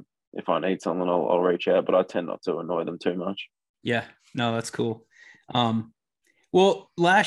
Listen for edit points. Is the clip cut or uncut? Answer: uncut